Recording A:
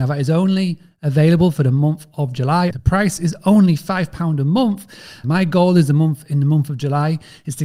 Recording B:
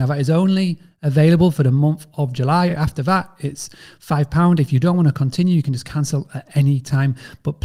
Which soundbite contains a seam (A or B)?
A